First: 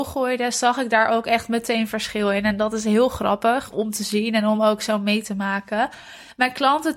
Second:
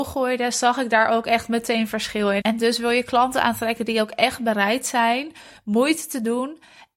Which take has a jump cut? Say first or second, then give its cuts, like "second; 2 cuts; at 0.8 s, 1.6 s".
second; 1 cut; at 2.4 s